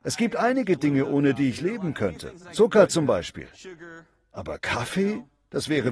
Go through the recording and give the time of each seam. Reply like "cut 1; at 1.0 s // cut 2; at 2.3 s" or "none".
none